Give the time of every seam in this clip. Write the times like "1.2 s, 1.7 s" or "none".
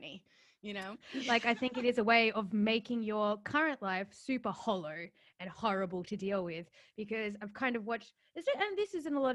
0.9 s